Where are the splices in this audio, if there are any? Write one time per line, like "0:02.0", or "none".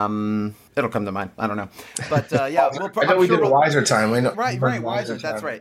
0:04.3